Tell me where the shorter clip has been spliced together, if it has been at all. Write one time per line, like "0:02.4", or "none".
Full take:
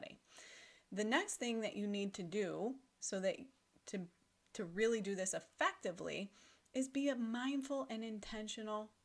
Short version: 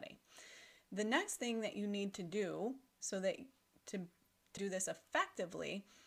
0:04.6

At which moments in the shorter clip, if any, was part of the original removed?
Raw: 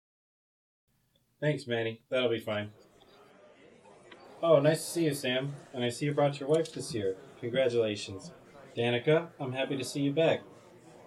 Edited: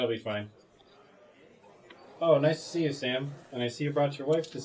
none

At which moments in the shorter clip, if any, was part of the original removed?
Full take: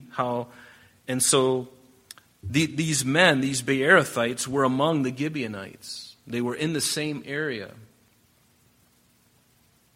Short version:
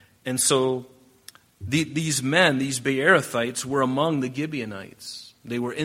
none

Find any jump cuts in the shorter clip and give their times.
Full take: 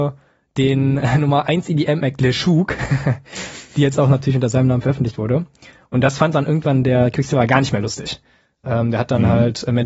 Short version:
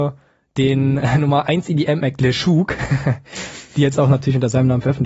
none

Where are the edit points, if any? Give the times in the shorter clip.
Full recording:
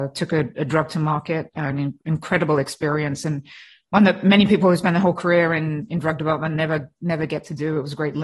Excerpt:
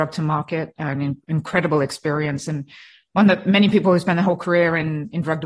none

